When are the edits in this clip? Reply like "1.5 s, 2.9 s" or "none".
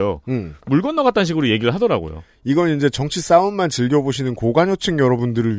none